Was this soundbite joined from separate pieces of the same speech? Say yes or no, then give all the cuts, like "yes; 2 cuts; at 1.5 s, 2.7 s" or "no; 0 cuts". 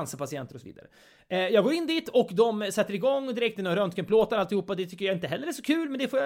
no; 0 cuts